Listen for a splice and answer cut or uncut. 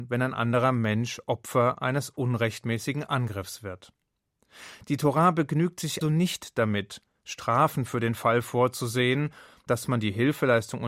cut